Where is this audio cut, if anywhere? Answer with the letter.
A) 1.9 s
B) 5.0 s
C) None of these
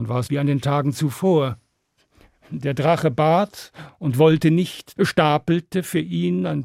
B